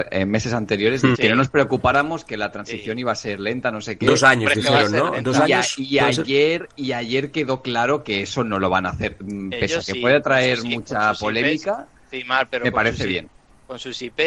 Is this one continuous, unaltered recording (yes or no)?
no